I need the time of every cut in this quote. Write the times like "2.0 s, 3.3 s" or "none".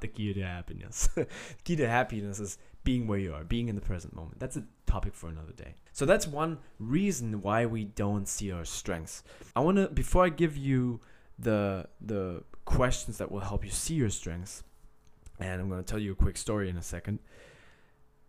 5.9 s, 9.5 s